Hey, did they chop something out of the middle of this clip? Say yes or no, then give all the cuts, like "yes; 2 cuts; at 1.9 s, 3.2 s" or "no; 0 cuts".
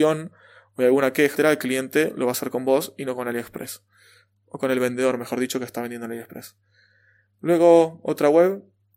yes; 1 cut; at 1.3 s